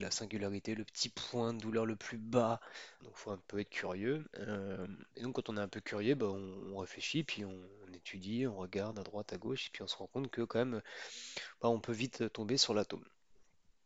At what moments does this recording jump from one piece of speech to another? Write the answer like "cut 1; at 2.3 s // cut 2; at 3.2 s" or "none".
cut 1; at 3.0 s